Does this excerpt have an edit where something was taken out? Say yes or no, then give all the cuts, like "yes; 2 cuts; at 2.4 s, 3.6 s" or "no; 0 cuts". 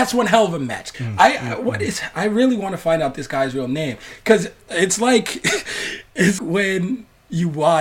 yes; 2 cuts; at 0.9 s, 6.4 s